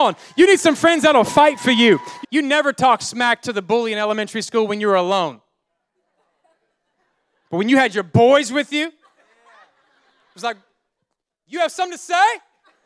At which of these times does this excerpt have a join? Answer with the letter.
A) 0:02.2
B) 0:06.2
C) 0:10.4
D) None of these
A